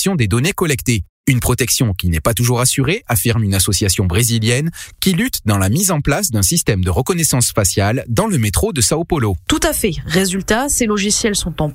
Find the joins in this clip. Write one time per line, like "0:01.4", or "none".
none